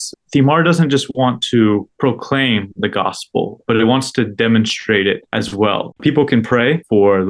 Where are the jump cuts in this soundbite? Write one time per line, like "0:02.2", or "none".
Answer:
0:06.0